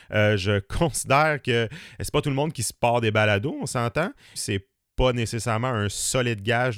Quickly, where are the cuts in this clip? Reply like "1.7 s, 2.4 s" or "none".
4.4 s